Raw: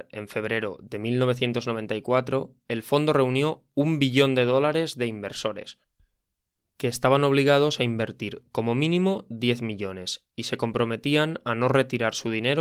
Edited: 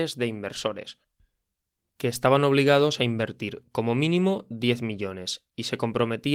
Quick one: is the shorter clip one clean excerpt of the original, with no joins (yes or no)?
yes